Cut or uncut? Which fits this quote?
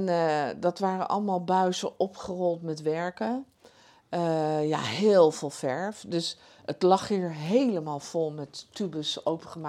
uncut